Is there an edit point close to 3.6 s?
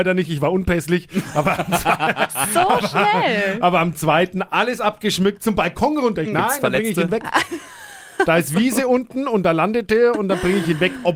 no; 1 cut; at 6.2 s

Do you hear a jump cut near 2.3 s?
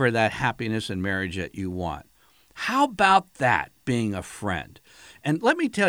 no; 0 cuts

